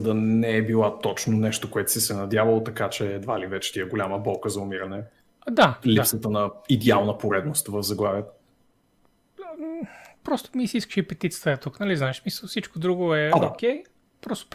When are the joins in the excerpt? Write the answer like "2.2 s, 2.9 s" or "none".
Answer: none